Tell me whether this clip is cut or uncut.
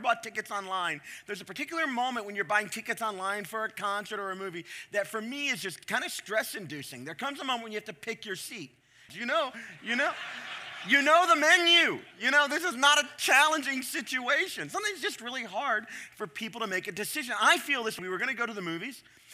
cut